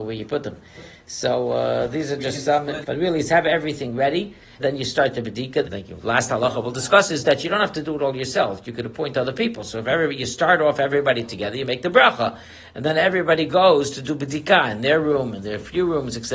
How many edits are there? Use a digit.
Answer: 3